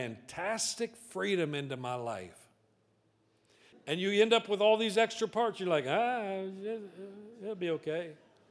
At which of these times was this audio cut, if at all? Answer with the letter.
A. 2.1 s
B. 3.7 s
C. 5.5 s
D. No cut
B